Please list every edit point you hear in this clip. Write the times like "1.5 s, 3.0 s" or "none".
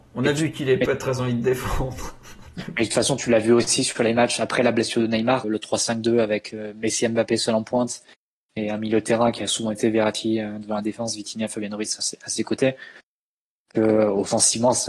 5.4 s, 12.0 s